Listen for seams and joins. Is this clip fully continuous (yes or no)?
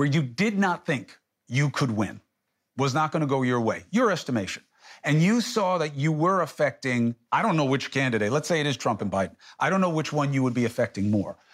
yes